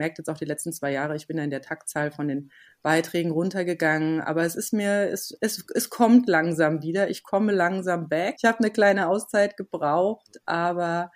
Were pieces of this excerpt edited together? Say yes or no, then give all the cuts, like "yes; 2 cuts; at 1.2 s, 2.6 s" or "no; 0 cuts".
yes; 1 cut; at 8.4 s